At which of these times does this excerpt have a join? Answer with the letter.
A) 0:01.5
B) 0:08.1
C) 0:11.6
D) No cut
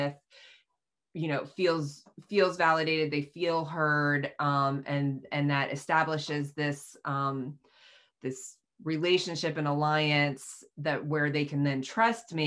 D